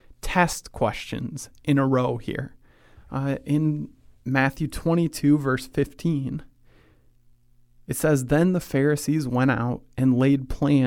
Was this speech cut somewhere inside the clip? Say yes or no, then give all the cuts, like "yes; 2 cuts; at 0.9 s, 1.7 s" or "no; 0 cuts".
yes; 1 cut; at 2.9 s